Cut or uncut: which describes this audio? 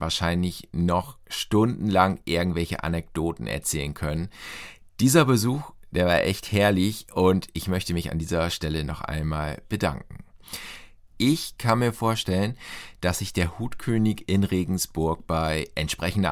cut